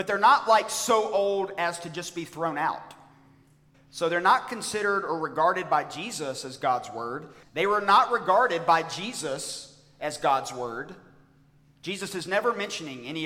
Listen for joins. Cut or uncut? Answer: cut